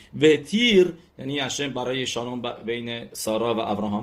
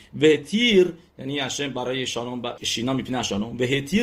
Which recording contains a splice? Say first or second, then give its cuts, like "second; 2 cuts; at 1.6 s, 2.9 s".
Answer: second; 1 cut; at 2.6 s